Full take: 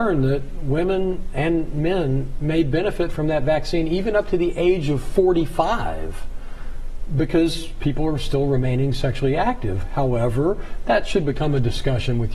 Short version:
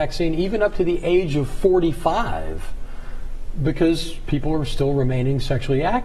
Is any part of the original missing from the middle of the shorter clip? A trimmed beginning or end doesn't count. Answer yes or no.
no